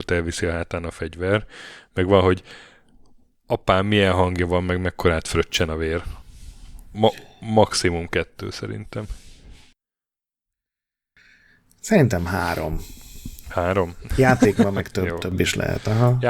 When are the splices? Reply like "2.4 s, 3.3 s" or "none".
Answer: 6.9 s